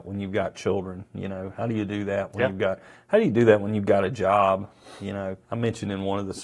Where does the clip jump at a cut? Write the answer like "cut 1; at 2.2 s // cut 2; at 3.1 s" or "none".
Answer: cut 1; at 5.4 s